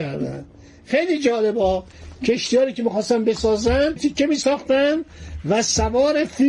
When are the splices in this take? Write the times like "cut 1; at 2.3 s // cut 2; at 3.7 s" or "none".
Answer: cut 1; at 4.0 s